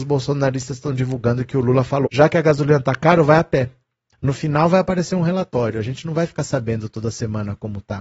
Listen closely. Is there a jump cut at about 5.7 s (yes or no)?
no